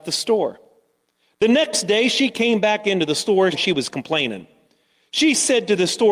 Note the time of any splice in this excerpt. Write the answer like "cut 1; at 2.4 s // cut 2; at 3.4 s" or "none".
cut 1; at 3.5 s